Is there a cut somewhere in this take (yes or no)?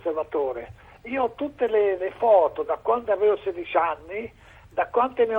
yes